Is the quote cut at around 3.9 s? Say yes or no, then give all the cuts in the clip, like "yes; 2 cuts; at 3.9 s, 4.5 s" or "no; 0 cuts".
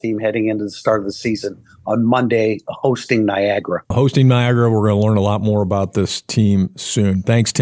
yes; 1 cut; at 3.9 s